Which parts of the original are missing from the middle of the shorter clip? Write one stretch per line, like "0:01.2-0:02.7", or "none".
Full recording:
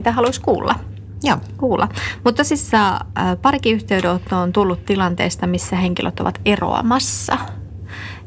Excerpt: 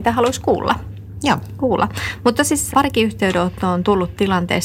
0:02.7-0:03.4